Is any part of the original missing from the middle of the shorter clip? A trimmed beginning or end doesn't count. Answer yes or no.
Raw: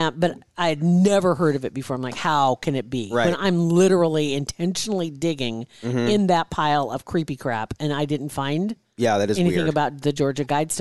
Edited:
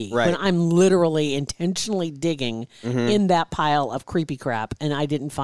no